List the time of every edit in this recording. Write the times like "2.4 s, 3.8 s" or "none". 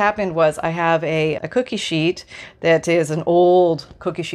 1.4 s